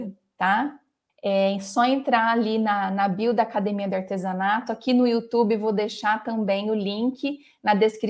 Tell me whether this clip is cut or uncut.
cut